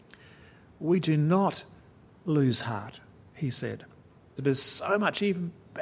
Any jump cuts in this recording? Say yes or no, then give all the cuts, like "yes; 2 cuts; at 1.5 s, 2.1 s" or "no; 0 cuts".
yes; 1 cut; at 4.4 s